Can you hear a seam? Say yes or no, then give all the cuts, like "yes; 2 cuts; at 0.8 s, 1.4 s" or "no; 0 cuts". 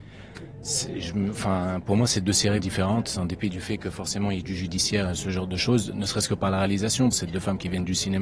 yes; 2 cuts; at 2.6 s, 7.1 s